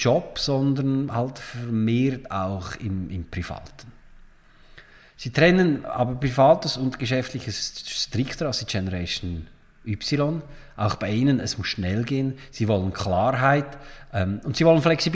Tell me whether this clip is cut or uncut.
uncut